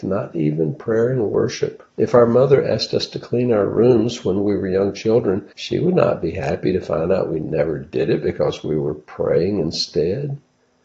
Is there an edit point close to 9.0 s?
no; 2 cuts; at 1.9 s, 5.5 s

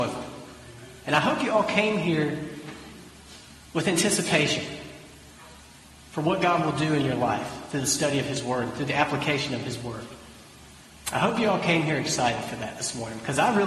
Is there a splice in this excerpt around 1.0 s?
yes; 1 cut; at 1.0 s

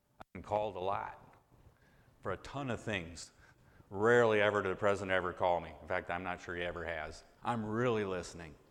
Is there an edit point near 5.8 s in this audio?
no; 2 cuts; at 3.8 s, 7.4 s

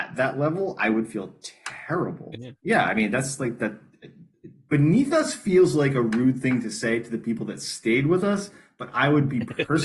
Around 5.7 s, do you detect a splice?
no; 1 cut; at 2.3 s

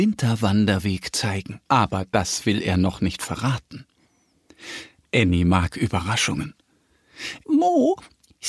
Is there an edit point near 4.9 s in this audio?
no; 2 cuts; at 1.7 s, 7.4 s

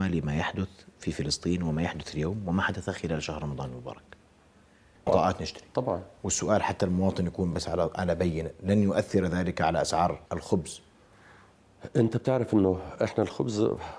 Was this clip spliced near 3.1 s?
no; 2 cuts; at 5.1 s, 10.3 s

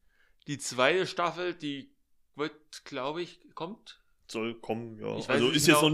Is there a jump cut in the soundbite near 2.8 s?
no; 0 cuts

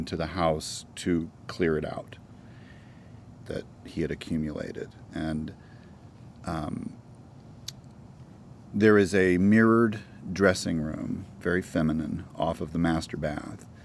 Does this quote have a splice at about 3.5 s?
yes; 1 cut; at 3.5 s

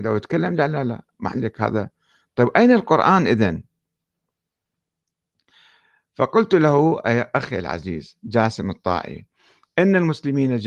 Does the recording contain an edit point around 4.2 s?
no; 0 cuts

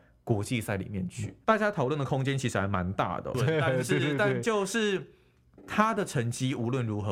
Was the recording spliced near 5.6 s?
no; 2 cuts; at 1.4 s, 3.3 s

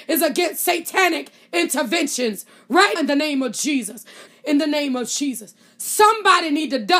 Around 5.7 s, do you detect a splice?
no; 2 cuts; at 3.0 s, 4.3 s

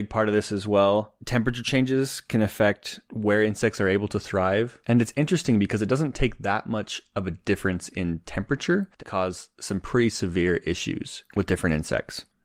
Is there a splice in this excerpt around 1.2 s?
no; 1 cut; at 9.0 s

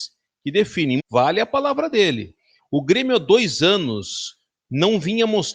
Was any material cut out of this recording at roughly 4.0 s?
no; 2 cuts; at 1.0 s, 2.6 s

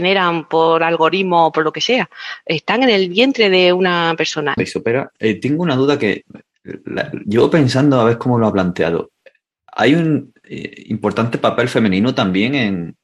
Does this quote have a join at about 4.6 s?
yes; 1 cut; at 4.6 s

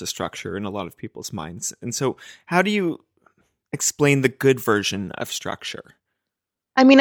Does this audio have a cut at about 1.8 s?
no; 0 cuts

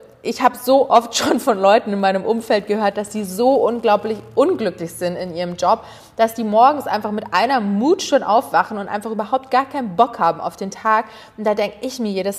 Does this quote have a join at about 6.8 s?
no; 0 cuts

